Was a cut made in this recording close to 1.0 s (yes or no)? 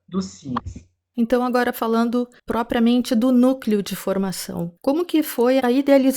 no